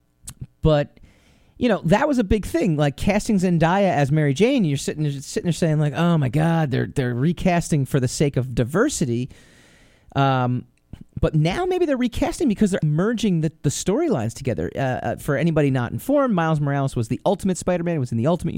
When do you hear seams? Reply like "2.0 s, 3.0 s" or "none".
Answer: 12.8 s